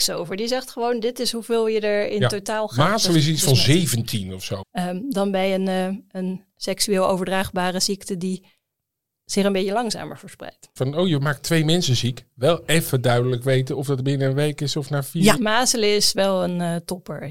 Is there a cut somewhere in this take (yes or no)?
yes